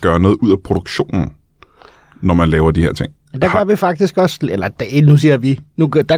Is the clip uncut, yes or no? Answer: yes